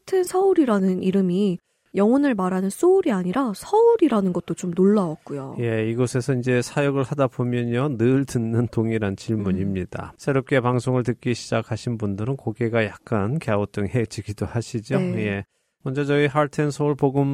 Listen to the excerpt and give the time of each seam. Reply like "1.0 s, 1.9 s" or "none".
10.2 s